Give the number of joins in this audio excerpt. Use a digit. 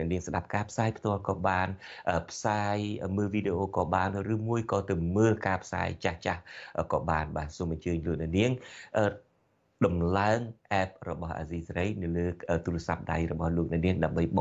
0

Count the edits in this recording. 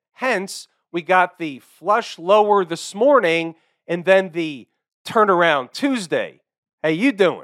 0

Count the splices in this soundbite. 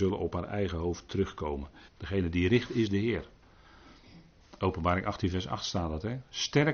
1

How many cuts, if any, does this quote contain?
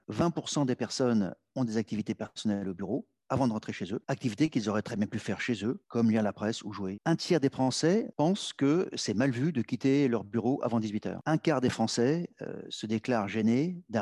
1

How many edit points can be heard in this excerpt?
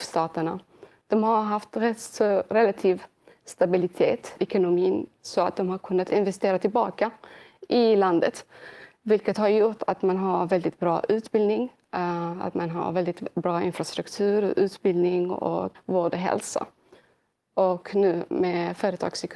2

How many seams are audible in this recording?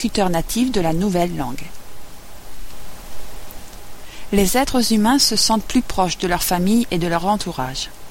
0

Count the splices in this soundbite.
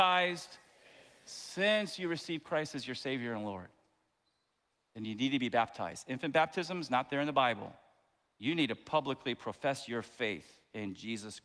0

